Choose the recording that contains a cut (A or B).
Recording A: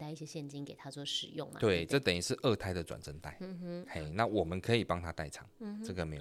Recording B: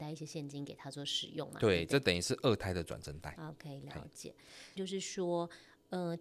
B